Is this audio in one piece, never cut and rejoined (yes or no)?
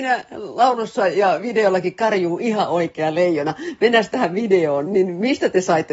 no